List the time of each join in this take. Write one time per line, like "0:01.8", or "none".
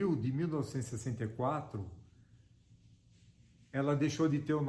none